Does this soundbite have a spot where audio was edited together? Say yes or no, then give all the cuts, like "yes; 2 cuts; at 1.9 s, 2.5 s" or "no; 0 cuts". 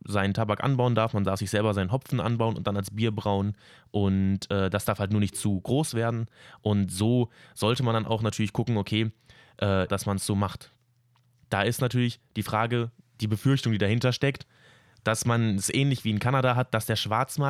yes; 1 cut; at 9.9 s